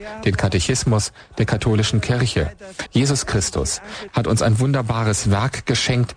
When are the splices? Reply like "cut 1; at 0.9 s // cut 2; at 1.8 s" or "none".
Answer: cut 1; at 2.9 s // cut 2; at 4.1 s